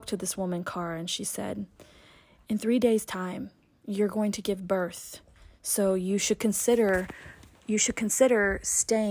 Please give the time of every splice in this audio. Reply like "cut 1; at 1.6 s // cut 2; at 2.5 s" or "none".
none